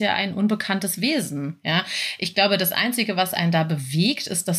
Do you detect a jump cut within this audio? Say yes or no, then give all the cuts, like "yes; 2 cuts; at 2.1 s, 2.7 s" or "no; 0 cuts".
no; 0 cuts